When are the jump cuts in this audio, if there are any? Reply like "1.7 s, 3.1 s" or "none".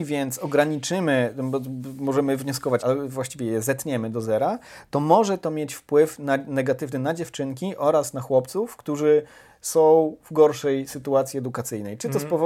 2.8 s